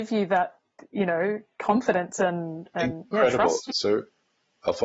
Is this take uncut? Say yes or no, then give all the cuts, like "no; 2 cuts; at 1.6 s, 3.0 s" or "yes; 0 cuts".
no; 1 cut; at 3.7 s